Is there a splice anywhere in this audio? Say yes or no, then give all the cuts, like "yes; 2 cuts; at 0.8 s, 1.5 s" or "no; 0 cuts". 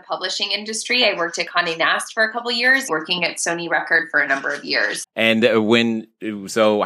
yes; 2 cuts; at 2.9 s, 5.0 s